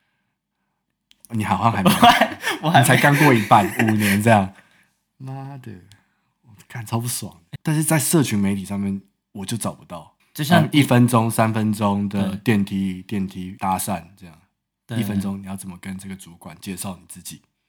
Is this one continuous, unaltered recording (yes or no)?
no